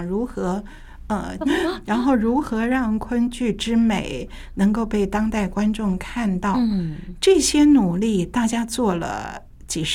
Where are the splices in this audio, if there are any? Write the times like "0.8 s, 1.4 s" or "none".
1.4 s